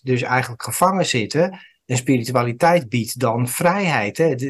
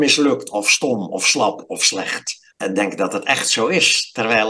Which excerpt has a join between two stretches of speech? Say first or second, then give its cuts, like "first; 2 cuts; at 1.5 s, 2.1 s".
second; 1 cut; at 2.5 s